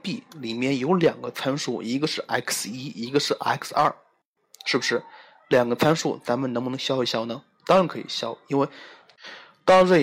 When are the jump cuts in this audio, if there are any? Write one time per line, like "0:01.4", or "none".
none